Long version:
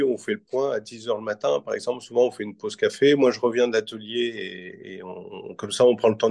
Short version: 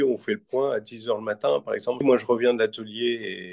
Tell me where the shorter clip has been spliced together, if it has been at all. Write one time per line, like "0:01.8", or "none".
0:02.0